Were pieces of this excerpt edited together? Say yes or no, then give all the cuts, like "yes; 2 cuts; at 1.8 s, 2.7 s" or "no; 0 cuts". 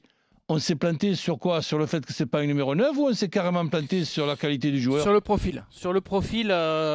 no; 0 cuts